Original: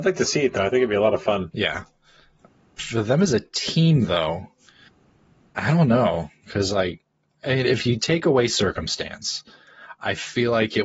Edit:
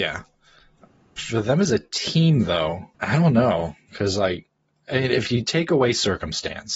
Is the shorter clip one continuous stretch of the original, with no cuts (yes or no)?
no